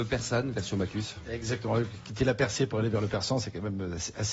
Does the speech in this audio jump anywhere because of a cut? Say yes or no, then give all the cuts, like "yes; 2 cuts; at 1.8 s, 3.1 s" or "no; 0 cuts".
no; 0 cuts